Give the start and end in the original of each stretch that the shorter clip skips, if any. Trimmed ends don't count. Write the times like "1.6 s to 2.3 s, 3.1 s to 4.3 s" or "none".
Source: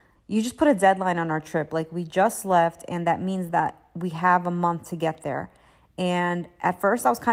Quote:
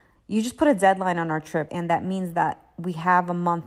1.7 s to 2.9 s

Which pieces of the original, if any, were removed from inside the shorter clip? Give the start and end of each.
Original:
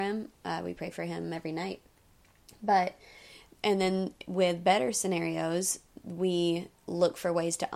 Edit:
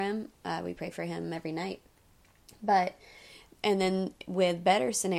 none

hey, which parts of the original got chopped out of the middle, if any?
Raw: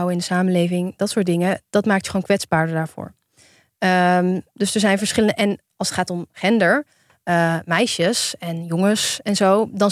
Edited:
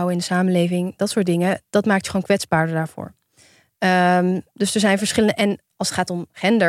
none

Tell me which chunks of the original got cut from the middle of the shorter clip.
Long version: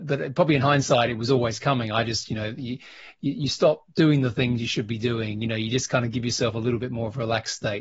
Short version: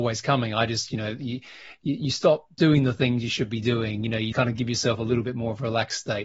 5.7 s to 5.9 s

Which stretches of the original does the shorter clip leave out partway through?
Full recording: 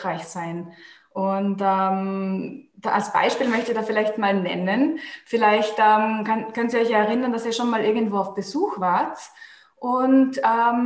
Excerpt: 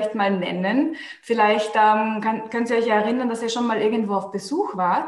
none

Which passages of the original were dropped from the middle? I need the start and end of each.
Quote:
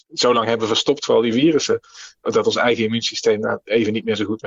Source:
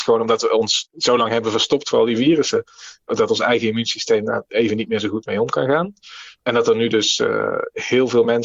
none

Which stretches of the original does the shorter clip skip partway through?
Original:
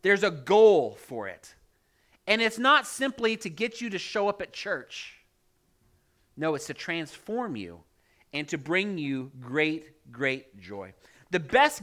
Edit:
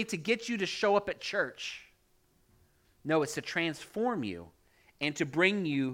none

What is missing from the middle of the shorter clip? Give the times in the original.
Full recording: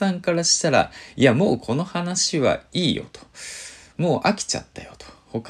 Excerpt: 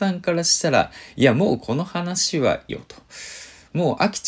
2.7 s to 2.9 s

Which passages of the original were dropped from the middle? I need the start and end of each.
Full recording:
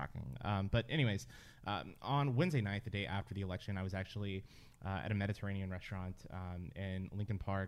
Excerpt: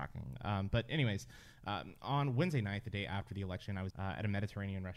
3.9 s to 4.8 s

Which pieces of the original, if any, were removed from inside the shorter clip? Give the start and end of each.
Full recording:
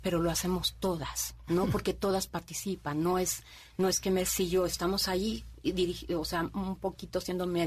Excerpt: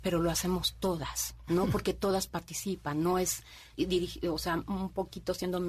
3.7 s to 5.6 s

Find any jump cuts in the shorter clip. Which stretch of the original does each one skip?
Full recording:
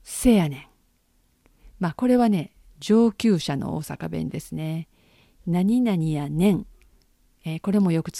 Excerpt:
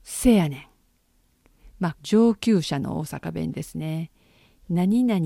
1.9 s to 2.7 s

